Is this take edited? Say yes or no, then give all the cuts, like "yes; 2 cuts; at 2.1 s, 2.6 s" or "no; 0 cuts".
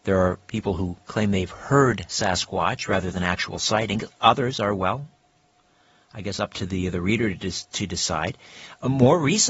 no; 0 cuts